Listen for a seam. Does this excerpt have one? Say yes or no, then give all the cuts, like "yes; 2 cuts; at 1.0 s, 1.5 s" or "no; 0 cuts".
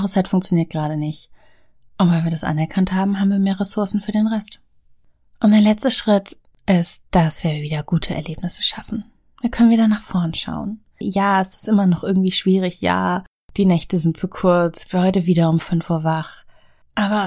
yes; 1 cut; at 11.0 s